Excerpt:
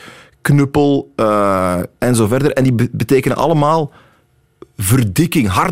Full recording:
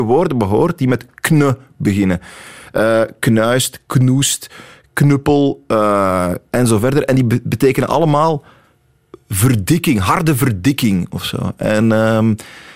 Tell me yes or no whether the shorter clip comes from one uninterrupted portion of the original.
yes